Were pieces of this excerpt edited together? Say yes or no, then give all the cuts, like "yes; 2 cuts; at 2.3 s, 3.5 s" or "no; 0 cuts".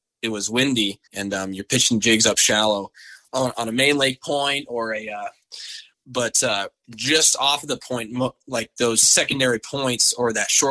yes; 2 cuts; at 1.1 s, 5.9 s